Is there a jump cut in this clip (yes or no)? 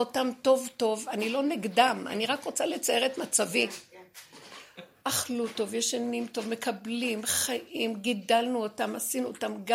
no